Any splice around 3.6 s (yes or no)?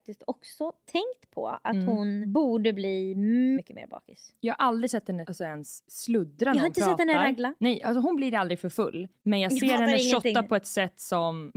yes